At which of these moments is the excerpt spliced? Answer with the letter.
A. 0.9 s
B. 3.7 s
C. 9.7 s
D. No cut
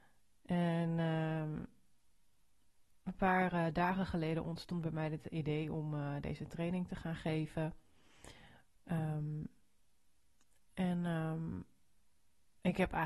D